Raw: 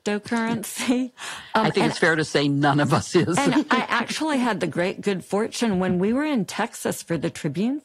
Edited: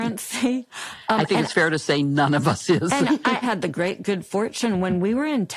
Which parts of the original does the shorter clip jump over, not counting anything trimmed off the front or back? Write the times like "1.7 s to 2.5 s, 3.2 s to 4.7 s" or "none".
3.9 s to 4.4 s